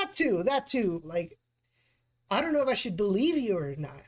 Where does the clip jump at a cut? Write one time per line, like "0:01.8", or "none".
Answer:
0:01.0